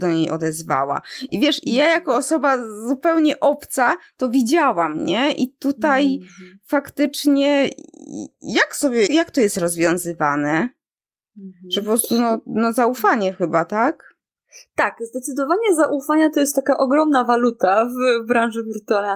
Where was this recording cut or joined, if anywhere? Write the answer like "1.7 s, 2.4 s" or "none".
9.1 s